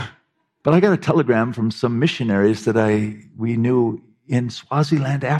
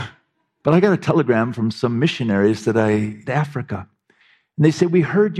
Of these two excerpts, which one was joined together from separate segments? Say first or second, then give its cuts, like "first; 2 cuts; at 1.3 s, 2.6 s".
second; 1 cut; at 3.3 s